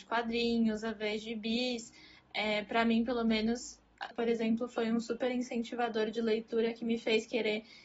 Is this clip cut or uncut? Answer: cut